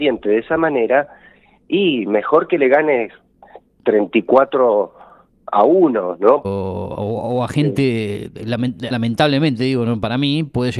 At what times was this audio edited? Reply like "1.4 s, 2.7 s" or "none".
6.4 s, 8.9 s